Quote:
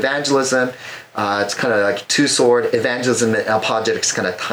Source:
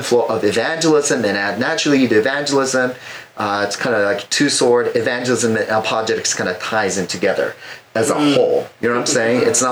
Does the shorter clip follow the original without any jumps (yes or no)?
yes